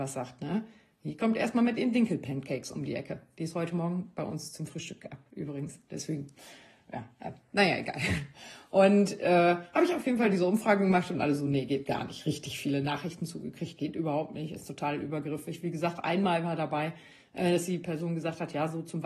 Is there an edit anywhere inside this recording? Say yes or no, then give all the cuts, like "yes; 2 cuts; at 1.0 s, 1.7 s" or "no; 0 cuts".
no; 0 cuts